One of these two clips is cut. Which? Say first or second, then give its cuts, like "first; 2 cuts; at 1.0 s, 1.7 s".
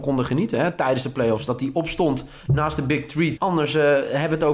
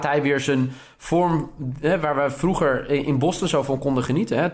first; 1 cut; at 3.4 s